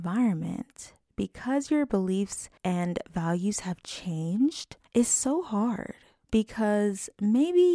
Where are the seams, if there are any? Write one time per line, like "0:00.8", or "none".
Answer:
0:02.6
0:04.9